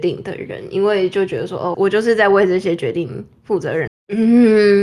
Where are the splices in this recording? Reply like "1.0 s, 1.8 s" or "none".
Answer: 1.7 s, 3.9 s